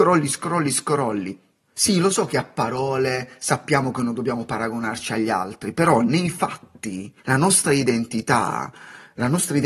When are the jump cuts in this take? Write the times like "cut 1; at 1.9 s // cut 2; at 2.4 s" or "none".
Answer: cut 1; at 1.6 s // cut 2; at 7.2 s